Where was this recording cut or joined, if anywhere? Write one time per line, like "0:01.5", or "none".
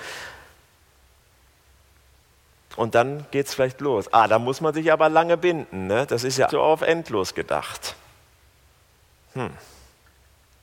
0:06.5

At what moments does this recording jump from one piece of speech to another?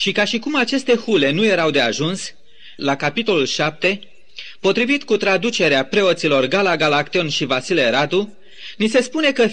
0:02.8

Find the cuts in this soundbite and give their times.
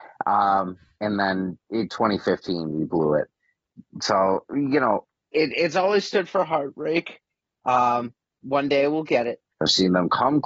0:09.5

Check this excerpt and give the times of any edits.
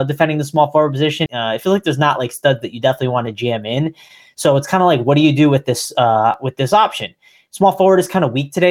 0:01.3

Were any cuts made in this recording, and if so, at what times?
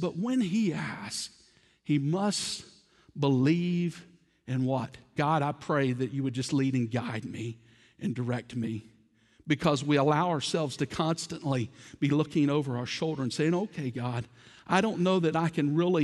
0:05.2

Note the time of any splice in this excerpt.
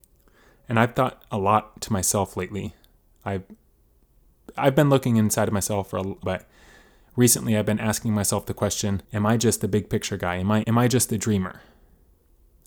0:06.2
0:09.0
0:10.6

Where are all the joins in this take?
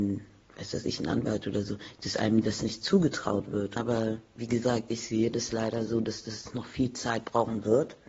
0:03.8

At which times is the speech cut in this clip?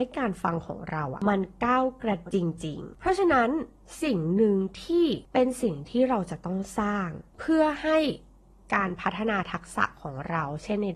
0:02.3

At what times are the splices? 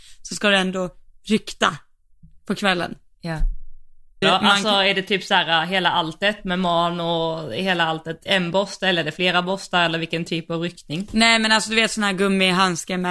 0:04.2

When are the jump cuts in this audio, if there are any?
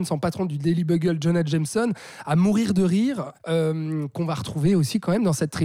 0:03.3

